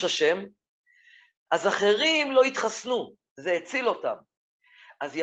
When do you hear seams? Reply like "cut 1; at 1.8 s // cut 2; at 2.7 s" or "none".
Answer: cut 1; at 1.5 s